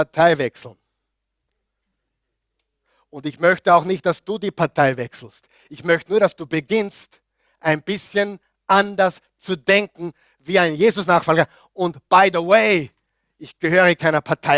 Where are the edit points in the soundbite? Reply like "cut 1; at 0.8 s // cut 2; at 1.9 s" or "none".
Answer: none